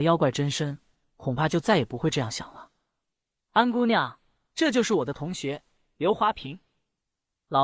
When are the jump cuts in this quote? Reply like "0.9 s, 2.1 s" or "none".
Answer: 3.4 s